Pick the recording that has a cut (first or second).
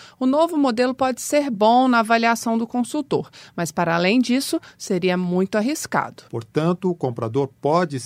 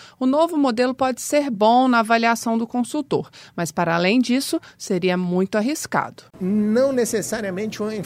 first